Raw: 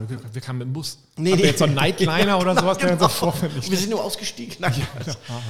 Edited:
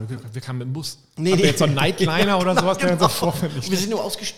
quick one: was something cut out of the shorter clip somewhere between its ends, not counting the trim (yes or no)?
no